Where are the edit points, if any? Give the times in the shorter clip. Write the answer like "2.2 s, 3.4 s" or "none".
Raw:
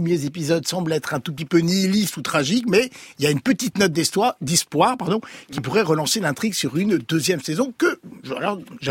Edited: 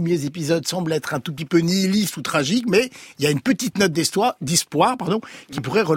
none